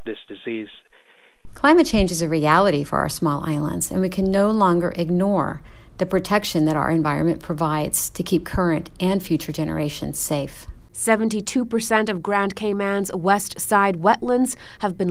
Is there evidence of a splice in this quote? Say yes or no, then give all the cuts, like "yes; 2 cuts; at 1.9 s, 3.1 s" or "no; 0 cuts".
yes; 1 cut; at 1.5 s